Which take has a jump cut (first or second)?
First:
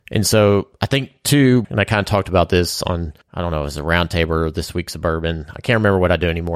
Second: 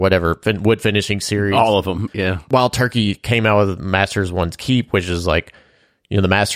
first